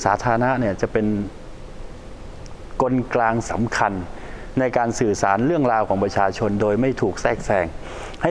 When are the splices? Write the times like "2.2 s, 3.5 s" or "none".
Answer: 3.1 s